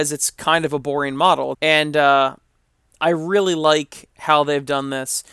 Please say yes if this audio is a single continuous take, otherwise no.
no